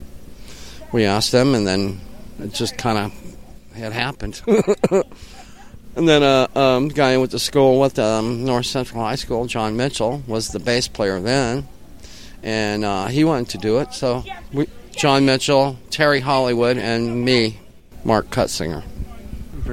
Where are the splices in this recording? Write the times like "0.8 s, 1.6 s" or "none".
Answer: 14.9 s